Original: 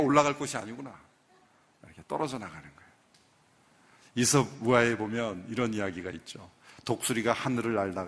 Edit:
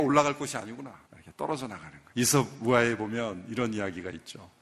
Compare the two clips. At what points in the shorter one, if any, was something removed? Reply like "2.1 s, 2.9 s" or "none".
1.0 s, 2.1 s

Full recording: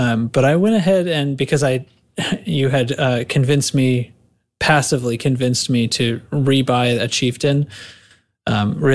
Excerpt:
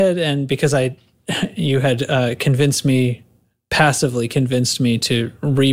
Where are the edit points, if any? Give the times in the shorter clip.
none

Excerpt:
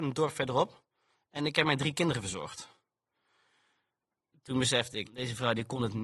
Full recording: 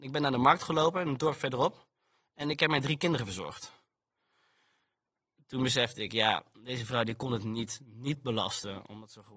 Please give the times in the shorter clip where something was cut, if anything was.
5.0 s

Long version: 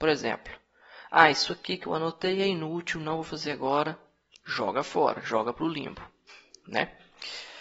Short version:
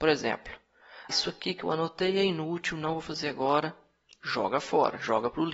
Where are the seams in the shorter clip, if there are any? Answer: 1.1 s

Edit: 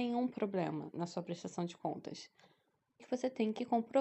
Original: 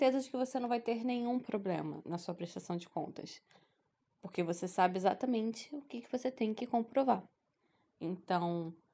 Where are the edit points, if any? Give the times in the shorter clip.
3.0 s

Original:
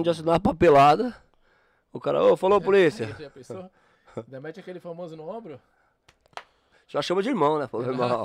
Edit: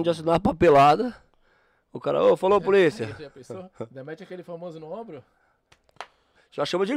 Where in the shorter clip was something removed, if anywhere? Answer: 3.7 s

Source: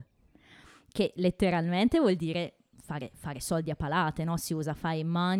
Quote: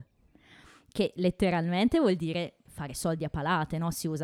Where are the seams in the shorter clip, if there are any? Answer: 2.7 s

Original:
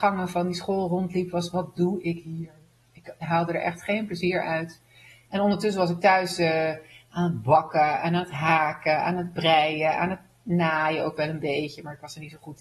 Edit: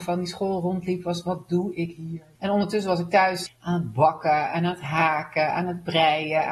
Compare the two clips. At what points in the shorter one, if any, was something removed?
2.3 s, 3.5 s

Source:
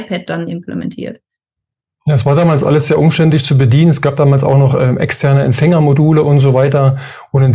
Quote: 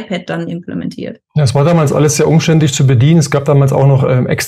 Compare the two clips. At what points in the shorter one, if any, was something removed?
1.3 s

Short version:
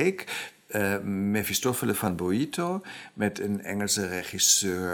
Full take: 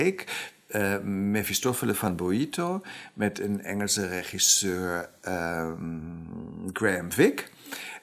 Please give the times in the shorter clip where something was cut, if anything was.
none

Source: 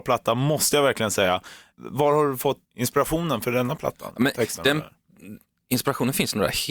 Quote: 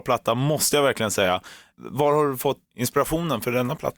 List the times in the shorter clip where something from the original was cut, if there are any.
none

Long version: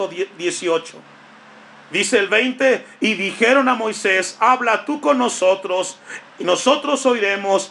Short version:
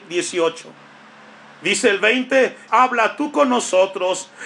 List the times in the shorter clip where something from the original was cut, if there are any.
2.7 s

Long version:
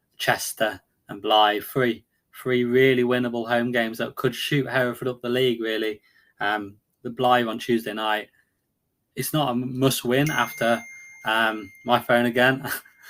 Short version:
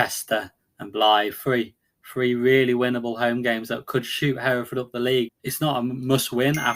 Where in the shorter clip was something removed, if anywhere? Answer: 5.3 s

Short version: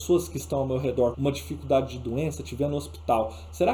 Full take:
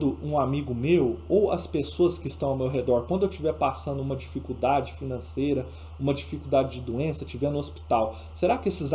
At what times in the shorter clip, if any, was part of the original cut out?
1.1 s

